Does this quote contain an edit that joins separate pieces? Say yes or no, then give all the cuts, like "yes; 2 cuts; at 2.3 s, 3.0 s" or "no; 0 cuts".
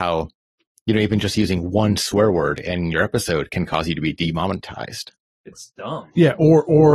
yes; 1 cut; at 5.3 s